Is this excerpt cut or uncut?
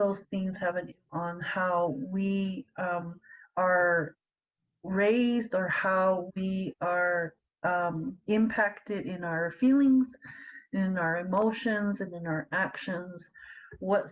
uncut